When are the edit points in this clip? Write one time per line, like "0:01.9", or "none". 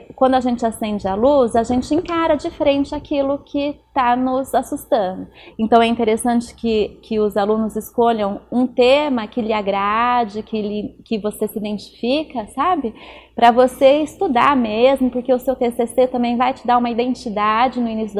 0:05.5